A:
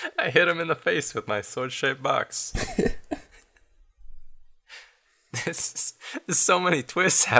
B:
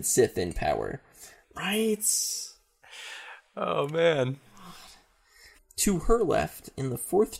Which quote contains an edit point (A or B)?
B